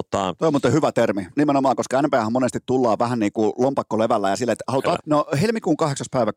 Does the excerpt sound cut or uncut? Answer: cut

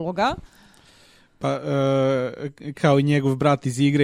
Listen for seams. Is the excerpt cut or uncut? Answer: uncut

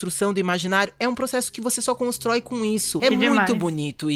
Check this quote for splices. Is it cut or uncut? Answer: cut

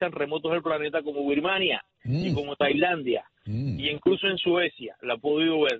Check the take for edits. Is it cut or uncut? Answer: uncut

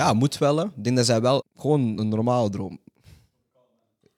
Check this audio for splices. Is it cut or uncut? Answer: cut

